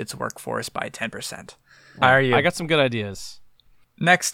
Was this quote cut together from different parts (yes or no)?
yes